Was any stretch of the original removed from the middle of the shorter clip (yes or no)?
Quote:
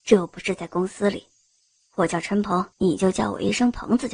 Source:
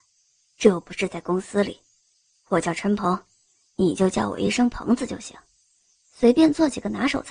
yes